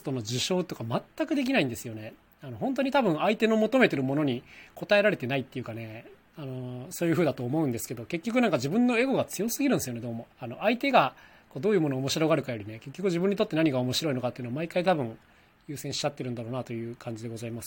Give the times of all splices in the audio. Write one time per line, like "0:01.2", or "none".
0:10.3